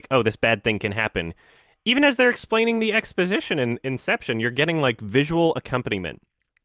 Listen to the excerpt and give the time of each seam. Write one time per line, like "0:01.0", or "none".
none

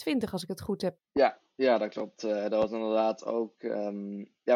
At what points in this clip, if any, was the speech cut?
none

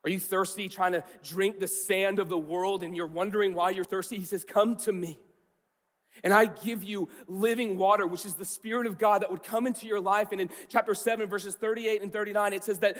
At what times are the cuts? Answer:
0:03.8

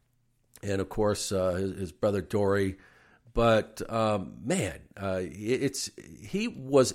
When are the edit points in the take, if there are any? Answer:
none

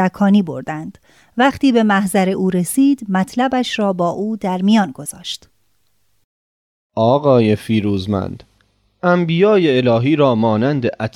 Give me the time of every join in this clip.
none

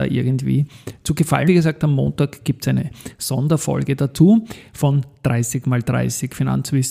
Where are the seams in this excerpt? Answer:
0:01.5

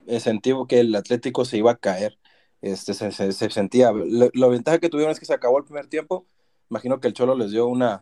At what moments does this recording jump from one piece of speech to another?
none

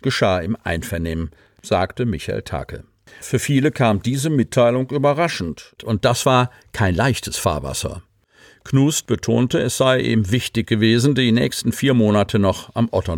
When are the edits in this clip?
0:03.2
0:05.8

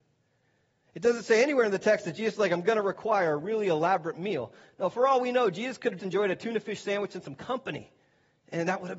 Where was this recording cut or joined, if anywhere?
0:06.0

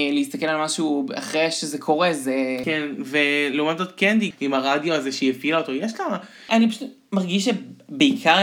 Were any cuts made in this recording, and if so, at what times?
0:02.6
0:04.3
0:06.5

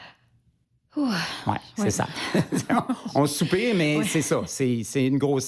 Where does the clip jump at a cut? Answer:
none

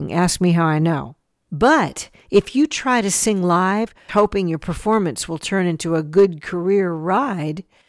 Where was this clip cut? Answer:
0:01.3
0:04.1

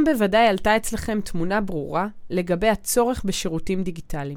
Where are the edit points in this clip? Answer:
none

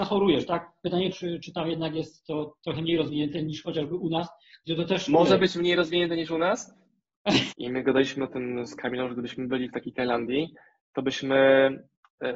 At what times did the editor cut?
0:01.1
0:07.5

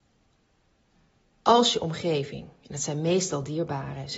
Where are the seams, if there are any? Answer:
none

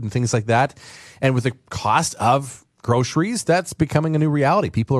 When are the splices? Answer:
none

